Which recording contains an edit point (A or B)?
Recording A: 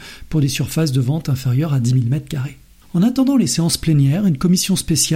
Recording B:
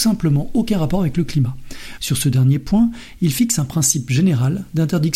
B